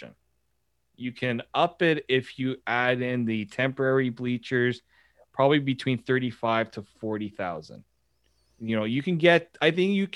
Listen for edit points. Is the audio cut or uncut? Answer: uncut